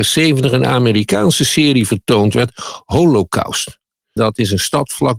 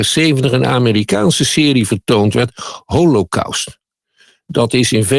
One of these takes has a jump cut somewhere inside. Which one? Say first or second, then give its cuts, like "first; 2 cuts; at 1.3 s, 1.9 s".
first; 1 cut; at 4.2 s